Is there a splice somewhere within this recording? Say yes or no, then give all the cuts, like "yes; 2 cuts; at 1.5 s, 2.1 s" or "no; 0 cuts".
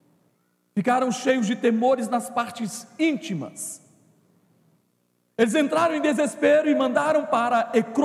no; 0 cuts